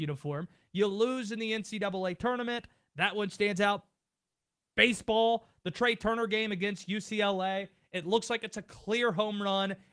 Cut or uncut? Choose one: uncut